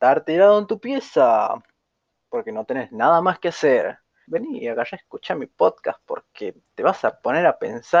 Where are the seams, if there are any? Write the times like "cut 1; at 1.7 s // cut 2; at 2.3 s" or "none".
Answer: cut 1; at 4.2 s // cut 2; at 6.6 s